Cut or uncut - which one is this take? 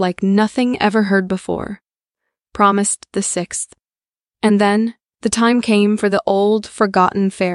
uncut